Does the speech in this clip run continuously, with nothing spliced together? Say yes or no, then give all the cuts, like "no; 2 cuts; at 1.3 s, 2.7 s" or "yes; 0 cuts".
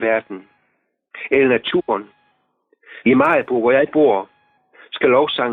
no; 1 cut; at 3.0 s